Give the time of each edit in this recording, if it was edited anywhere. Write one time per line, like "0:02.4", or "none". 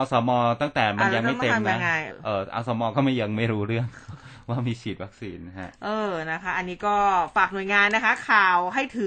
0:02.1